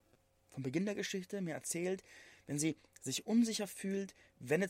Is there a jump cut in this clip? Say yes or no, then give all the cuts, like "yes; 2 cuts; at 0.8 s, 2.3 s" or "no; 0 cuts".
no; 0 cuts